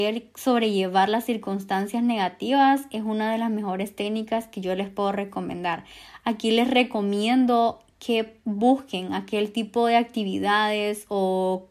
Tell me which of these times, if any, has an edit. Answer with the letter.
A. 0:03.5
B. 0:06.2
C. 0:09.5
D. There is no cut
D